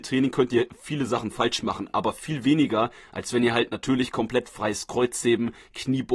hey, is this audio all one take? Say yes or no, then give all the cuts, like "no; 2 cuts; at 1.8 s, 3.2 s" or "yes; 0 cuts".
yes; 0 cuts